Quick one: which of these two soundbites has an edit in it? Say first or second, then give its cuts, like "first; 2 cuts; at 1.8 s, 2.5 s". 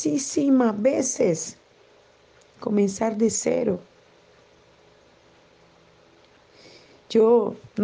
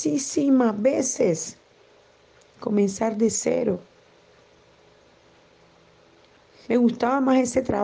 second; 1 cut; at 6.6 s